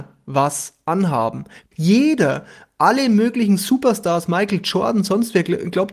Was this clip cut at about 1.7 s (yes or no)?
yes